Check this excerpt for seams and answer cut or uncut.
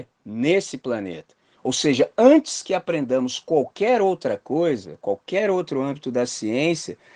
cut